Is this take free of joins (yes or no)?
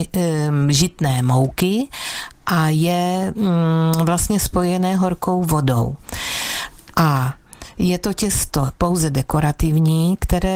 yes